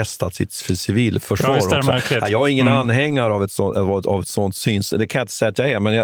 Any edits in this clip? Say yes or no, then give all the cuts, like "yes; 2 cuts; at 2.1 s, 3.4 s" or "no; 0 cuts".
no; 0 cuts